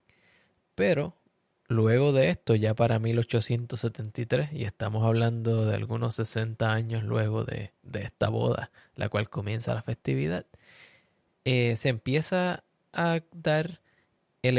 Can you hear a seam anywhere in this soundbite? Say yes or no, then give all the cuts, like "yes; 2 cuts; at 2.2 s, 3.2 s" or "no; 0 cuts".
no; 0 cuts